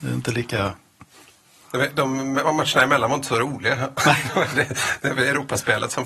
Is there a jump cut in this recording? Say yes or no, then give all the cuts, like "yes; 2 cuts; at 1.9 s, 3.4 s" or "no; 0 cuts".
no; 0 cuts